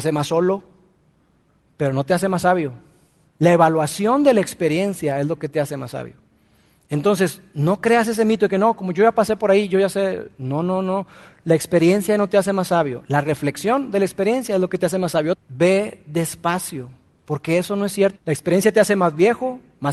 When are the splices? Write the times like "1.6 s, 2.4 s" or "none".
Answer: 15.3 s, 18.1 s

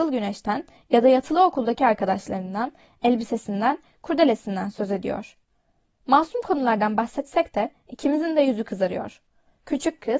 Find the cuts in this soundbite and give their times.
none

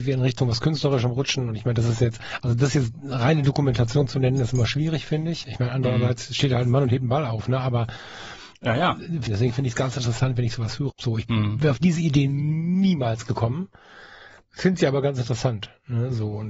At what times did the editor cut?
9.3 s, 10.9 s

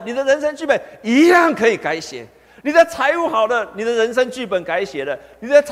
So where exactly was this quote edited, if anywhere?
none

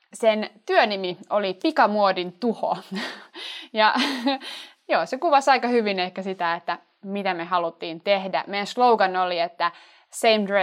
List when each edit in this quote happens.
none

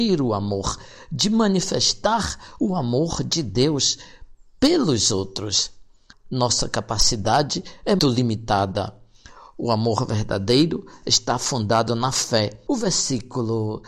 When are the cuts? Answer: 6.1 s, 8.0 s, 12.7 s

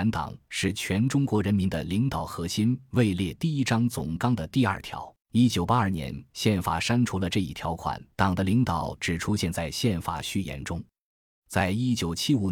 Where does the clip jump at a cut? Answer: 5.2 s, 8.1 s, 11.3 s

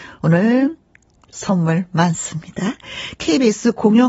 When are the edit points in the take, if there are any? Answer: 3.2 s

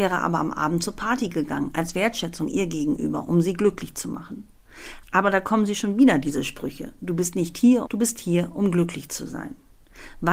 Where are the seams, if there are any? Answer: 7.8 s

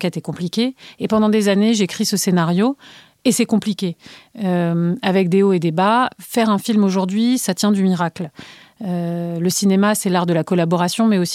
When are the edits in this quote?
none

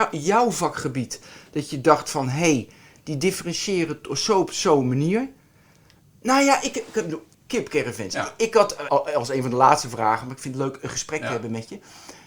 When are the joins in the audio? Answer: 7.3 s, 8.9 s

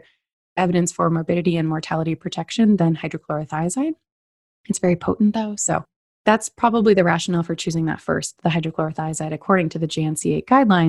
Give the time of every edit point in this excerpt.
none

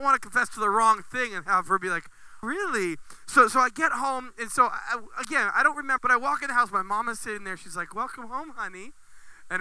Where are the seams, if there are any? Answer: 2.4 s, 6.0 s

